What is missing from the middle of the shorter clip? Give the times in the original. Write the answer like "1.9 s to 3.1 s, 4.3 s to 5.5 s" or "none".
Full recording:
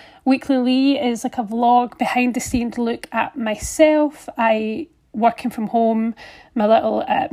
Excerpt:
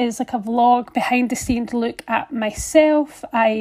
none